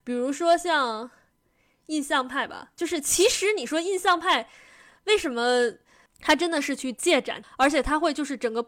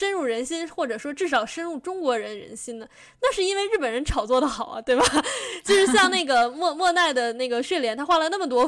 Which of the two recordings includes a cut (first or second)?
first